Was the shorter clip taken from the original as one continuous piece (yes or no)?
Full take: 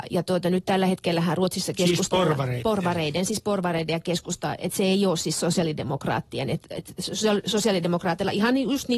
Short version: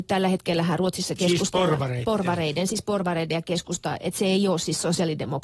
yes